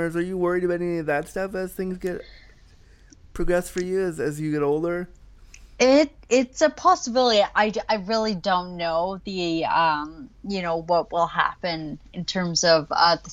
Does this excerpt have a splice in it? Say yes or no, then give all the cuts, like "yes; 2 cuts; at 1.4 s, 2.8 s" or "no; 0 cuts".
no; 0 cuts